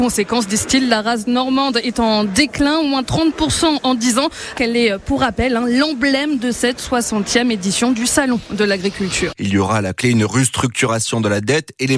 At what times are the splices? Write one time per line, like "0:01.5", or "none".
0:04.5
0:09.3

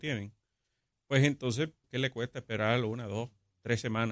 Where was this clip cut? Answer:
0:01.8

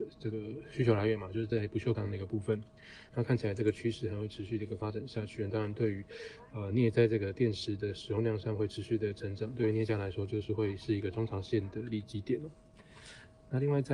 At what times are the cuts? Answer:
0:03.1

